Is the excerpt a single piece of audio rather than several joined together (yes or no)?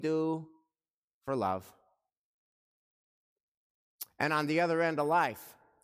yes